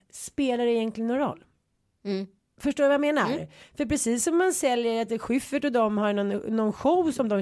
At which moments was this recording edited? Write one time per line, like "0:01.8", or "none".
none